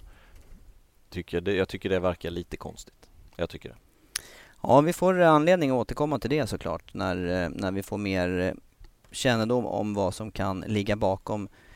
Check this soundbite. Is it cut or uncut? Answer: cut